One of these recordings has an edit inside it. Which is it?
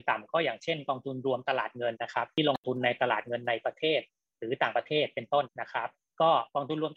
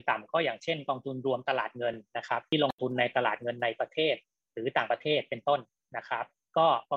first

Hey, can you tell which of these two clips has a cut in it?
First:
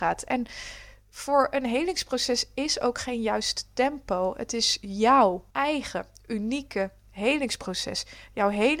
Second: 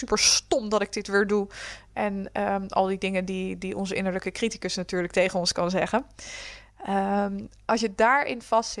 first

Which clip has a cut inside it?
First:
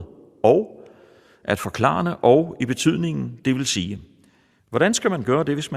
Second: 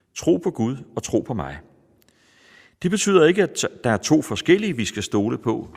first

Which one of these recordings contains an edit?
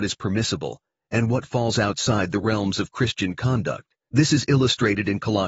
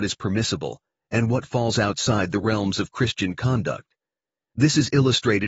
first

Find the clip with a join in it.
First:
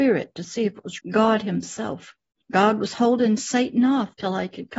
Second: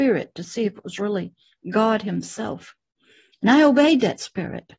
first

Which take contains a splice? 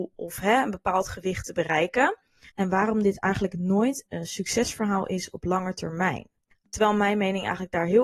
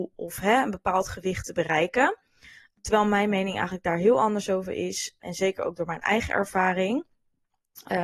first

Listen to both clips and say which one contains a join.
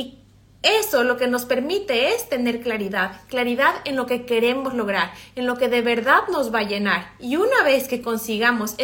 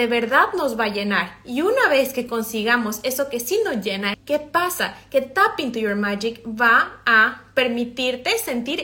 second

